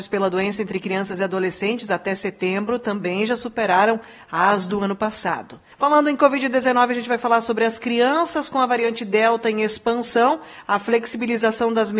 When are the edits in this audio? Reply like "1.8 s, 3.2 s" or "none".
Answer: 5.7 s